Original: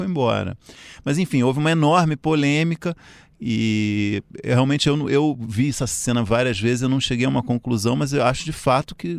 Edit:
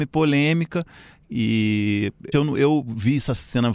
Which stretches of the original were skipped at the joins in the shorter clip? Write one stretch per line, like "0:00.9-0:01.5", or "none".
0:04.4-0:04.8